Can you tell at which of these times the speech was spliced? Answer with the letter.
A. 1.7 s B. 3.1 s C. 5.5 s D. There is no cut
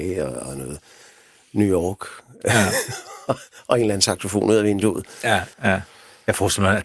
C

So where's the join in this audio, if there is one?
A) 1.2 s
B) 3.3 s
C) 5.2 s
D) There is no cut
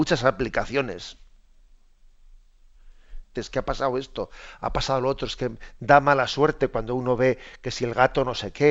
B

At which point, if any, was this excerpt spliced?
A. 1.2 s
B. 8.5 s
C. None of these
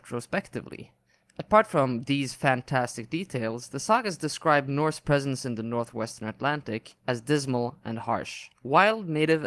B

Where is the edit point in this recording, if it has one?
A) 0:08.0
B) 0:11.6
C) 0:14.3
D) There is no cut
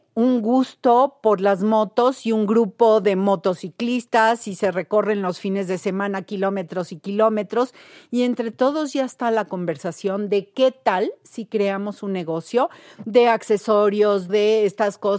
C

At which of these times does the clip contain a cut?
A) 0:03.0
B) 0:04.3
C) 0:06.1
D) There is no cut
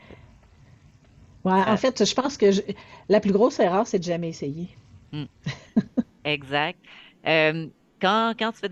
D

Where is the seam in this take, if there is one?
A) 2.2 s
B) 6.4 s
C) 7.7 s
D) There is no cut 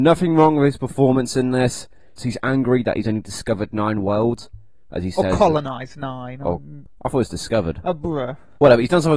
A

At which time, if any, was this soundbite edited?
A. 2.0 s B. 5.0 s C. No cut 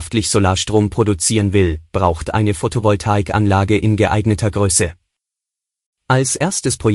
C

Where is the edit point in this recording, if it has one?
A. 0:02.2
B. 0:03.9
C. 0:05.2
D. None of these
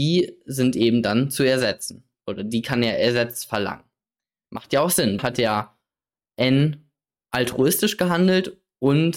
C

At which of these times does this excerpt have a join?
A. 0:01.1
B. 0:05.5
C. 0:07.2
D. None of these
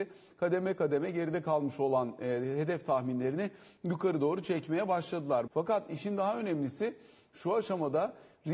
B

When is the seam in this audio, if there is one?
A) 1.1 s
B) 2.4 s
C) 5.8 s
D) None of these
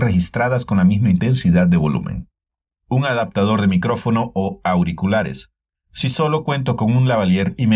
D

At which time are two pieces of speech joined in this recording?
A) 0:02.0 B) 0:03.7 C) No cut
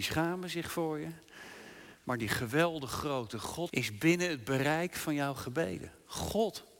B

